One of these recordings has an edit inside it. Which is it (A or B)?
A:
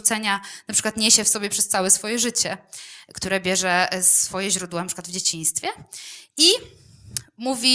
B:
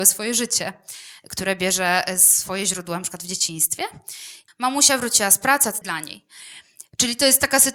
B